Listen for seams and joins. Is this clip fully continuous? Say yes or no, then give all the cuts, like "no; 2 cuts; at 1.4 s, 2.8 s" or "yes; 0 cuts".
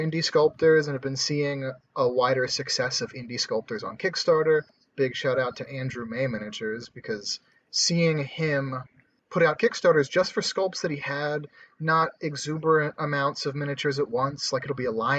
yes; 0 cuts